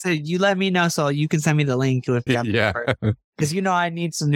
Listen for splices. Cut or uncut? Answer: cut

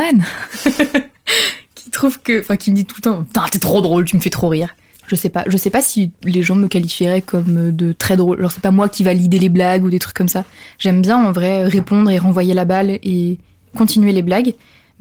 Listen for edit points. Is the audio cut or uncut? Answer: uncut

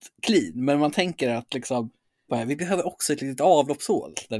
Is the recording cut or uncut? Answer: cut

